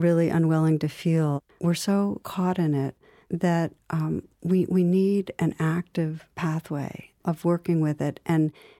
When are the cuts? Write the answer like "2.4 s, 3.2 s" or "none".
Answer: 1.5 s